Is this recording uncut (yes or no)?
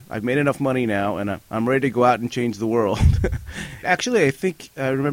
no